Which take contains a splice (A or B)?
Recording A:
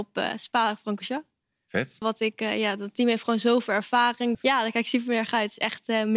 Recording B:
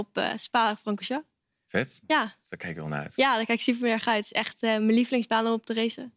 A